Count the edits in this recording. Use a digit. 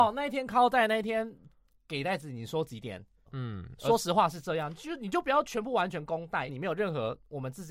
2